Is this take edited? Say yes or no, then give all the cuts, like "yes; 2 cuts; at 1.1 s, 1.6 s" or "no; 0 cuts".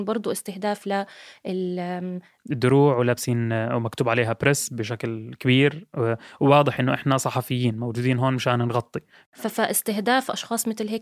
yes; 1 cut; at 2.4 s